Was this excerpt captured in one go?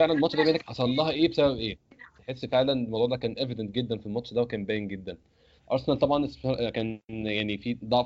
no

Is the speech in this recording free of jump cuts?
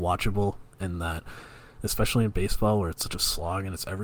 yes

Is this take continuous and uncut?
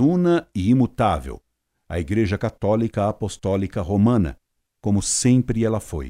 yes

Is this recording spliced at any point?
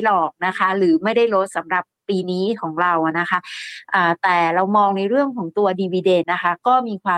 yes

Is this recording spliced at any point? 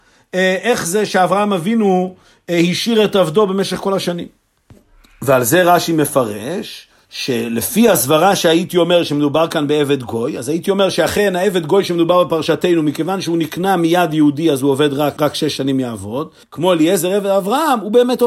yes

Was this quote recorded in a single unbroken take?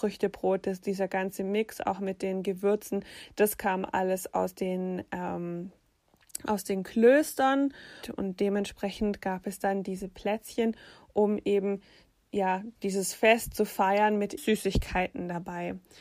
no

